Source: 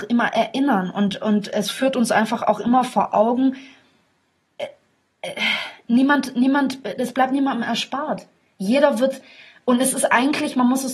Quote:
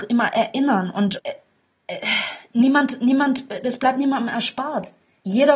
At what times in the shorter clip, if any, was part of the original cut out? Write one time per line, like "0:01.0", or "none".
0:01.2